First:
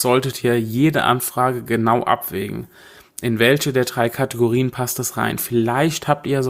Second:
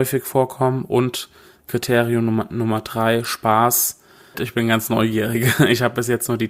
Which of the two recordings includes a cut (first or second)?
second